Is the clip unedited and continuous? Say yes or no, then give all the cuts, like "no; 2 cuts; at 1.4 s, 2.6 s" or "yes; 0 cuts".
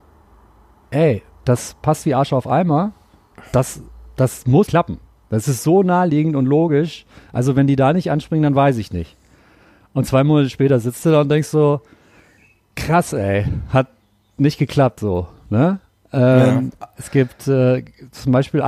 no; 1 cut; at 4.7 s